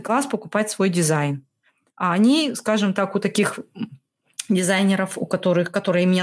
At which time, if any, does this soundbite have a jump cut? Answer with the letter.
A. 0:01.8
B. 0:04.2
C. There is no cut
C